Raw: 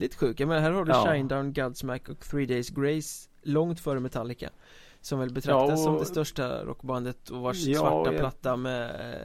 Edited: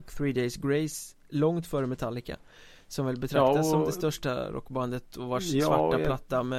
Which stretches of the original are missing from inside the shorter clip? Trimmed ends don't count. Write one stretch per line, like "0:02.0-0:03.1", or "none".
none